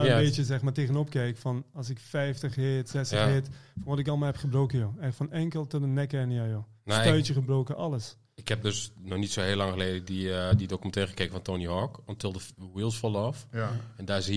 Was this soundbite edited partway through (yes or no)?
no